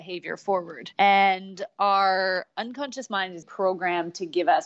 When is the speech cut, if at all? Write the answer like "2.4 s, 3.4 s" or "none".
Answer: 0.9 s, 3.4 s